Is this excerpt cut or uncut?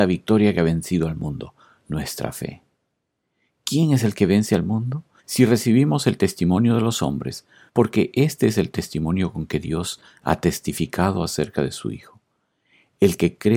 cut